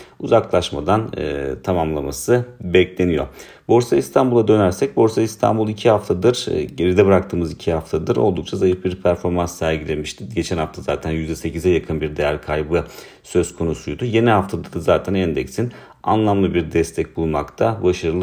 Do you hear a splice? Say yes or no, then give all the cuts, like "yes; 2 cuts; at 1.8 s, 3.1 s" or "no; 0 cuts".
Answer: no; 0 cuts